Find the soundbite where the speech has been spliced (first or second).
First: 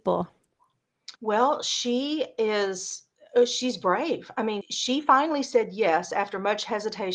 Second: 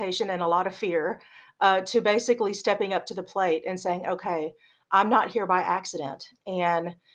first